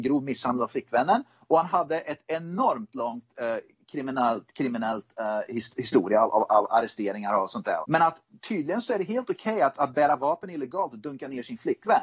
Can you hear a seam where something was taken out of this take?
yes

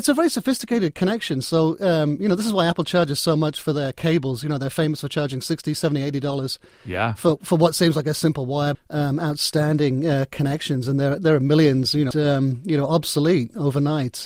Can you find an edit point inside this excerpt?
yes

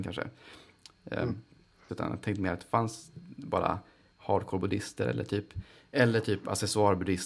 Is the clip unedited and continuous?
no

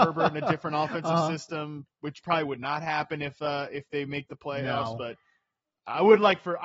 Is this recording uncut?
yes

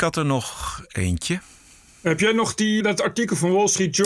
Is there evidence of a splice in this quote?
yes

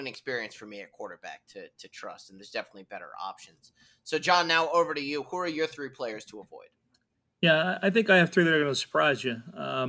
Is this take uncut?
yes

